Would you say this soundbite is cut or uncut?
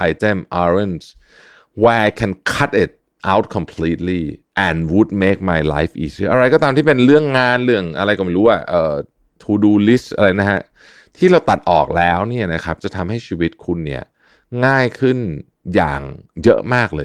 uncut